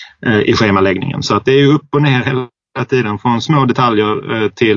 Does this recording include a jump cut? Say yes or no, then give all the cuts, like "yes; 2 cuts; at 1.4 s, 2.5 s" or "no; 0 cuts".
yes; 2 cuts; at 1.4 s, 3.2 s